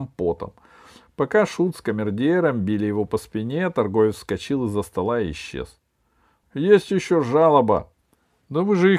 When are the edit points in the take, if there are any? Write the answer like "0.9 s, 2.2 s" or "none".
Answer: 6.4 s, 7.9 s